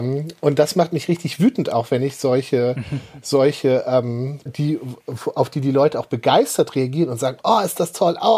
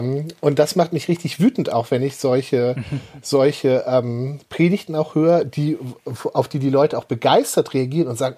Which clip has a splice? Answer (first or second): first